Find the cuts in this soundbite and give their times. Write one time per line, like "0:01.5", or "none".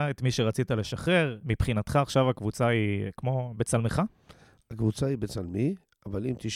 0:01.4

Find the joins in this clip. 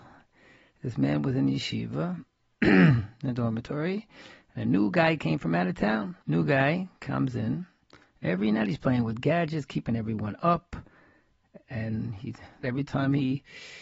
0:06.2
0:12.6

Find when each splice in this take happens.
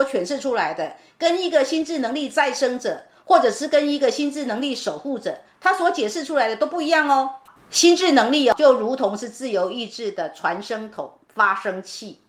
0:07.6

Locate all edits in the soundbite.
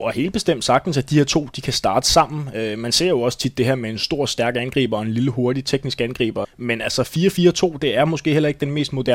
0:06.4

